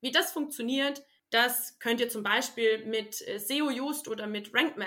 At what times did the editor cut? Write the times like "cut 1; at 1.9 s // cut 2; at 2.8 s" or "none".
none